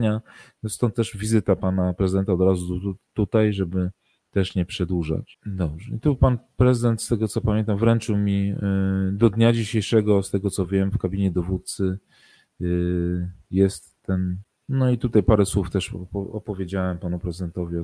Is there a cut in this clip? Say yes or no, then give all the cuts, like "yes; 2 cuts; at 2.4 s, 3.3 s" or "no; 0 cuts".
no; 0 cuts